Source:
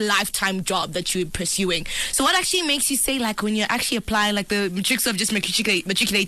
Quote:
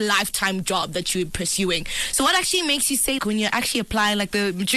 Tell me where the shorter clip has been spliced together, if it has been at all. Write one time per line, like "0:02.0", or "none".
0:03.2